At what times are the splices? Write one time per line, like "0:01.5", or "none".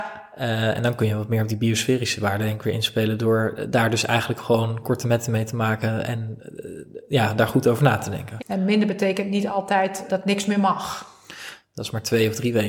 0:08.4
0:10.1
0:11.6